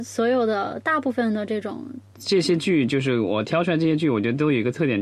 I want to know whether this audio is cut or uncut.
cut